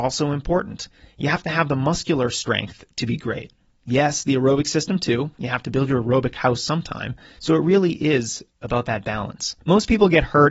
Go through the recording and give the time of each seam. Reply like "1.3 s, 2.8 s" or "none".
9.6 s